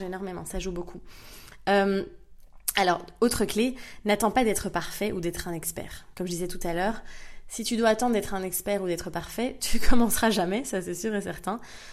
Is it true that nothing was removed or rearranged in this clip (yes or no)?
yes